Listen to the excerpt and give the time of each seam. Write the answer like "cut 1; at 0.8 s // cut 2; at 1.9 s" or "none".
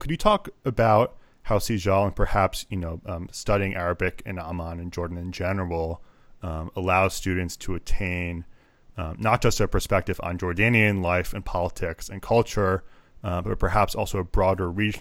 none